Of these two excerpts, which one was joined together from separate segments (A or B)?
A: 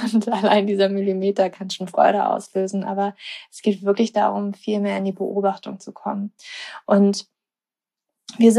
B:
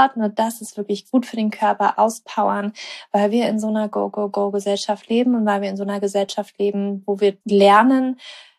B